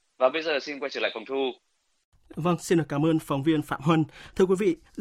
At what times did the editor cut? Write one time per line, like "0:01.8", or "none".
none